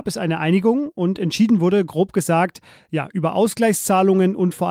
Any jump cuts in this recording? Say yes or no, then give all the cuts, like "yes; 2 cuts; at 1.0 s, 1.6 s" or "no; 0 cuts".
no; 0 cuts